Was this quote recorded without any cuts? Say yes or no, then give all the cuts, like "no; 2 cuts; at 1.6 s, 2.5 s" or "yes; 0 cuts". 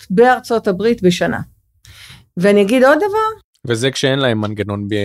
yes; 0 cuts